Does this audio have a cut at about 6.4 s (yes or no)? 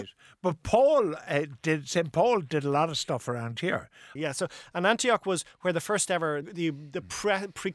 yes